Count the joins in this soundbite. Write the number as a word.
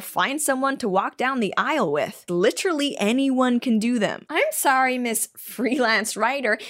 two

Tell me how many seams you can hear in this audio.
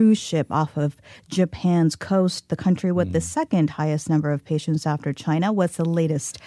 zero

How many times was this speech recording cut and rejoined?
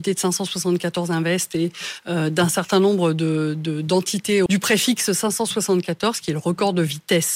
one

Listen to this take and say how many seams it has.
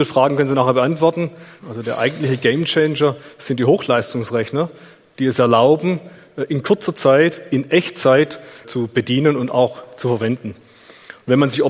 two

